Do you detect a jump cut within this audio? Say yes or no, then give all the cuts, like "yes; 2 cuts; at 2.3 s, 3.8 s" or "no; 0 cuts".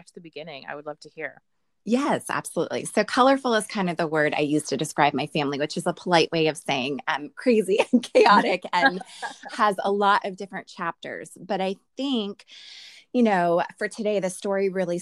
no; 0 cuts